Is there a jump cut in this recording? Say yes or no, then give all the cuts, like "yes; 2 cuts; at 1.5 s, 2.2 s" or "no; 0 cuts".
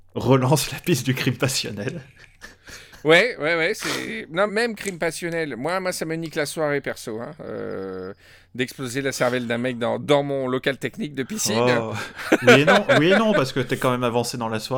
yes; 1 cut; at 4.5 s